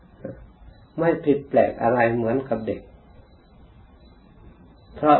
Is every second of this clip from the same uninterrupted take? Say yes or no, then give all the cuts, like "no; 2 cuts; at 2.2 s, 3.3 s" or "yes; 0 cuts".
yes; 0 cuts